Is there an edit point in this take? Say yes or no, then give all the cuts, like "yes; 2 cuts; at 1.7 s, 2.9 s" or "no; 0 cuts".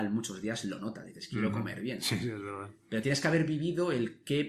no; 0 cuts